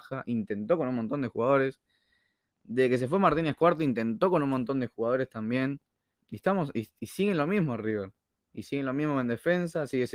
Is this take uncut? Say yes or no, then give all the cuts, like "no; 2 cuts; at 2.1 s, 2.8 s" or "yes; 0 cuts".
no; 1 cut; at 6.1 s